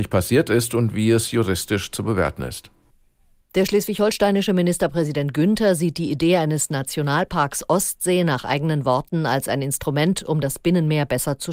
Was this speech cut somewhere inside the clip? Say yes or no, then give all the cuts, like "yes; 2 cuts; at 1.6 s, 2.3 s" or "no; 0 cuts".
no; 0 cuts